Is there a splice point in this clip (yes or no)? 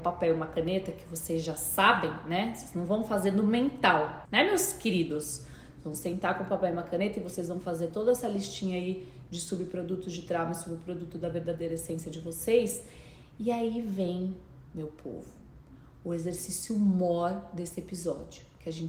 yes